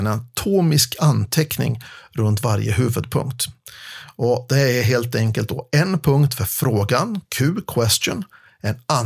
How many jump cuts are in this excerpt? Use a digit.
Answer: 0